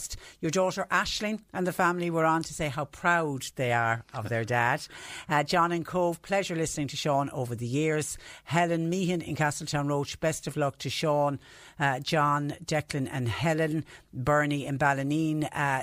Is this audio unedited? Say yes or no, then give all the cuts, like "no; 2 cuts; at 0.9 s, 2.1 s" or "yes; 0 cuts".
yes; 0 cuts